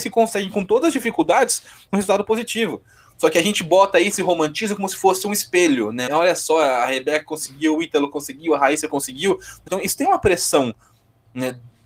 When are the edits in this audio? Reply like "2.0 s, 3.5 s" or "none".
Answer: 6.1 s, 9.7 s